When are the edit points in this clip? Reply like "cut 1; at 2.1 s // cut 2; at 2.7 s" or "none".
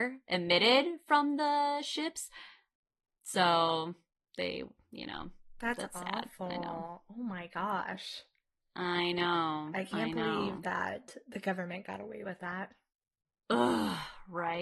none